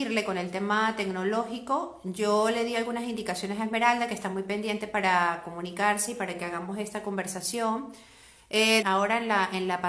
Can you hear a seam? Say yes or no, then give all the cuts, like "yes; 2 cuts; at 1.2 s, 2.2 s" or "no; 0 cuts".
yes; 1 cut; at 8.8 s